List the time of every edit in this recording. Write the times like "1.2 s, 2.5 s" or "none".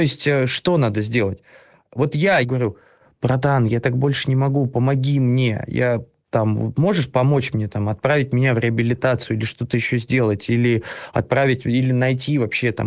2.4 s

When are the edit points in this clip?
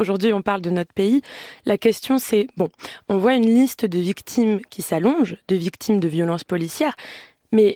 none

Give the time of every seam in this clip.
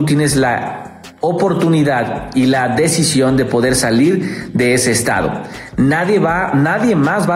none

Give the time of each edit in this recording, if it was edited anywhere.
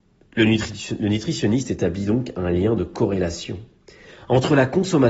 none

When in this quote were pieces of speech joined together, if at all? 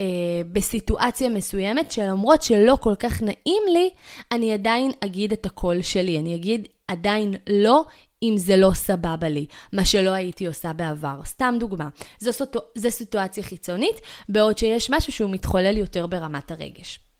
none

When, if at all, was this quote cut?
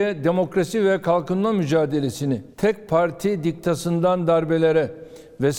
2.5 s

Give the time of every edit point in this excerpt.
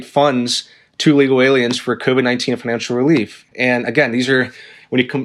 3.5 s

